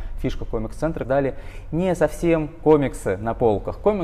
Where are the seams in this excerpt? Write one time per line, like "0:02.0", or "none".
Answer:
0:01.0